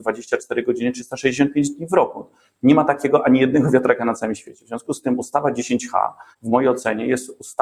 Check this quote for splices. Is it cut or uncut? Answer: cut